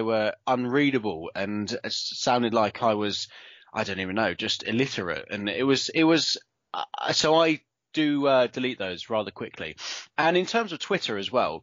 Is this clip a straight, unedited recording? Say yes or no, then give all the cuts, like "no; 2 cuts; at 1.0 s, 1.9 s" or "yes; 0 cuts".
yes; 0 cuts